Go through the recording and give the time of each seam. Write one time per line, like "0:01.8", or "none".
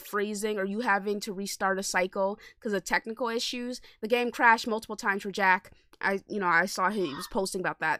none